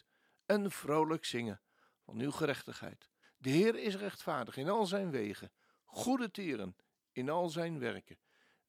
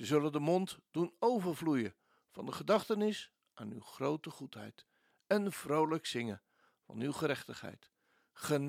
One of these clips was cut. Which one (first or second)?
first